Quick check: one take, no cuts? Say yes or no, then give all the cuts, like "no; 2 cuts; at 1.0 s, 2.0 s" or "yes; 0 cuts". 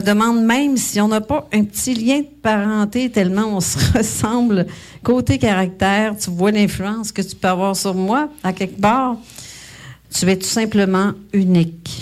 no; 1 cut; at 10.0 s